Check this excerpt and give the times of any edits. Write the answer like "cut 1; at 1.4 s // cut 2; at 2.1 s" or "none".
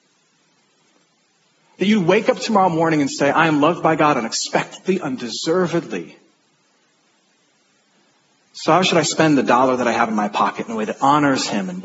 none